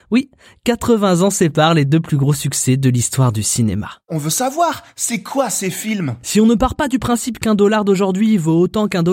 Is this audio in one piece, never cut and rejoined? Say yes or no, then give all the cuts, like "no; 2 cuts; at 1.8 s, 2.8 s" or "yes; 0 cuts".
yes; 0 cuts